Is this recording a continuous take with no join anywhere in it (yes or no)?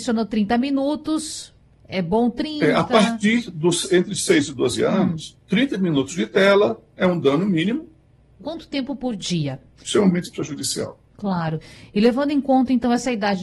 no